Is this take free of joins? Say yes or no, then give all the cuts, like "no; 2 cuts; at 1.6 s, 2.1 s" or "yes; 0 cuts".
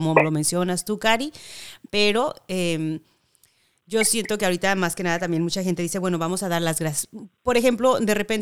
yes; 0 cuts